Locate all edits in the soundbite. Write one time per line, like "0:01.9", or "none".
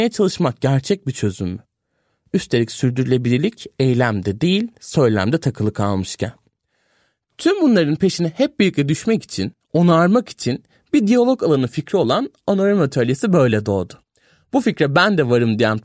none